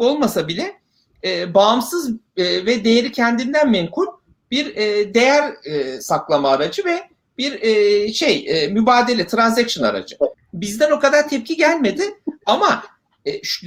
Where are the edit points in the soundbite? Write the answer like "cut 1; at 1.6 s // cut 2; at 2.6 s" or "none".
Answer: cut 1; at 10.3 s